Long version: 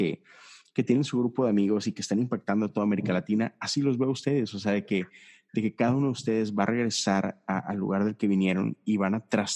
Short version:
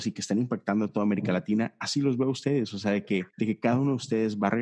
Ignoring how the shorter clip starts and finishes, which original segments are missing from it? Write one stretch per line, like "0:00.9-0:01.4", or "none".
0:05.1-0:05.5